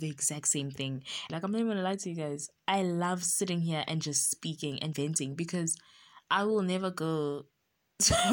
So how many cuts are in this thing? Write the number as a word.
two